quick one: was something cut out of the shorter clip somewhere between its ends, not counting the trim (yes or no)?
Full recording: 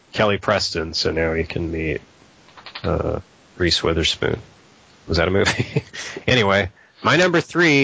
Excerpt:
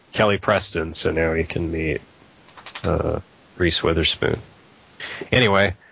yes